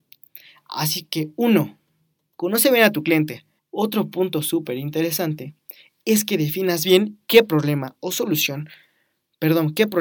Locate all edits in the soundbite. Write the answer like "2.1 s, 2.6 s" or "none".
3.6 s